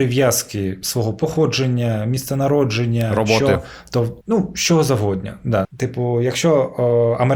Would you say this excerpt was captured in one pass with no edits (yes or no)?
no